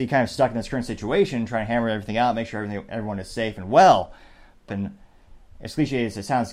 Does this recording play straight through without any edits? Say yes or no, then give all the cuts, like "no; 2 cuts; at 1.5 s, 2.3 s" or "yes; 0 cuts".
no; 1 cut; at 4.7 s